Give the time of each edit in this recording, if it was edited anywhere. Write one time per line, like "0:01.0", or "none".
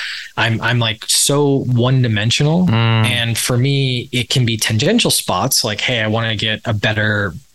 none